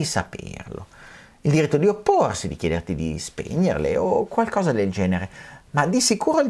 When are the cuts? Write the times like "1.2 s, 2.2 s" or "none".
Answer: none